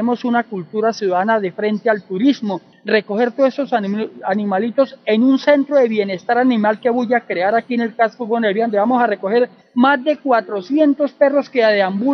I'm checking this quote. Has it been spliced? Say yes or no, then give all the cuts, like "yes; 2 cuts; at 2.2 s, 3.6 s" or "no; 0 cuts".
no; 0 cuts